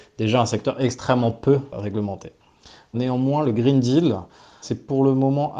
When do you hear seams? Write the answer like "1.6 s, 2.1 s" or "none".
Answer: 1.7 s